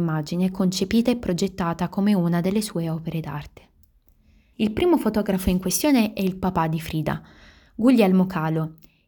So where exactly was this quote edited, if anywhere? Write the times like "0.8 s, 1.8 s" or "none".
4.5 s